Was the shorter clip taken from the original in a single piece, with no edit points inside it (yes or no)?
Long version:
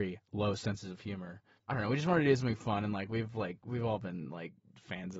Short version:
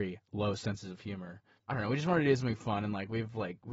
yes